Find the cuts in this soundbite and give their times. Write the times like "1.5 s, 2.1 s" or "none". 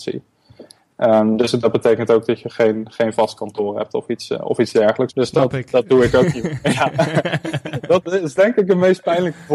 5.1 s

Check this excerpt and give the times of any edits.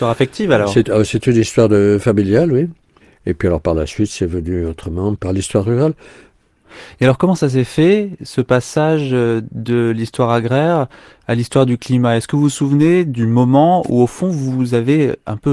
none

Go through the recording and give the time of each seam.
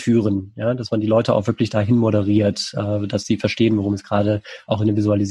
none

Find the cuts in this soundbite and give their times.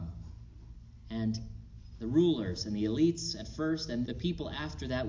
4.1 s

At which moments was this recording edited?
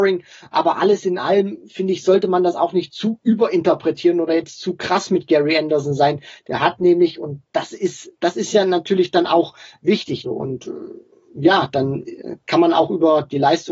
10.2 s

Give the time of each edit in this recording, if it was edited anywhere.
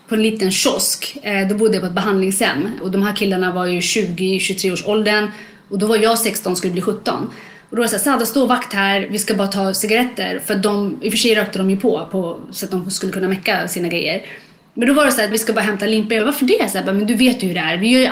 10.4 s, 15.3 s

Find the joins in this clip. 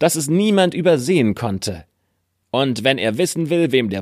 2.4 s

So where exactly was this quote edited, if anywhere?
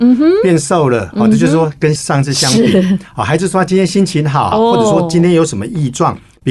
4.5 s

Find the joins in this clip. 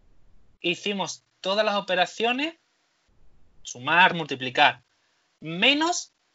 4.1 s

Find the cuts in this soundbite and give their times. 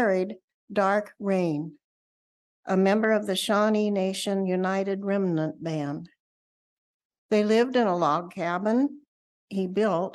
none

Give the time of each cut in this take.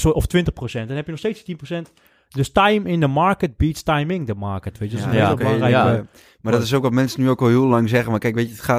none

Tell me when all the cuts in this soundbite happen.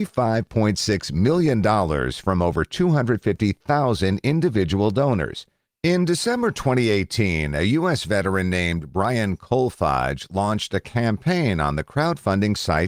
5.7 s

